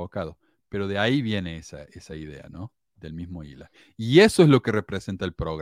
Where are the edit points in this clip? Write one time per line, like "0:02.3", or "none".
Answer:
none